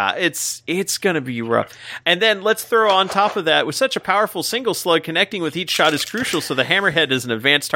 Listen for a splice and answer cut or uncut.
uncut